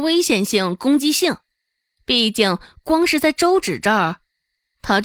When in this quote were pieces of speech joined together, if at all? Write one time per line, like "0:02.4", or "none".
0:02.0